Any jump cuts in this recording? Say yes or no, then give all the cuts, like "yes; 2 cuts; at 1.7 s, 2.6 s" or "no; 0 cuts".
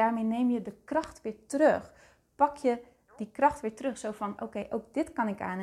no; 0 cuts